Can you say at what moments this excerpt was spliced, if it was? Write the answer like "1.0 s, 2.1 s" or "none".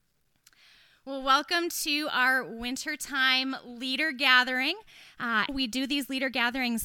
5.5 s